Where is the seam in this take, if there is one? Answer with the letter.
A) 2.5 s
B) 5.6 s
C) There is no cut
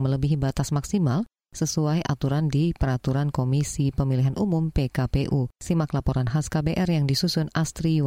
B